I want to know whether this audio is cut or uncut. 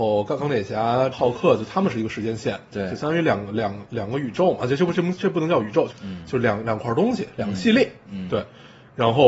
cut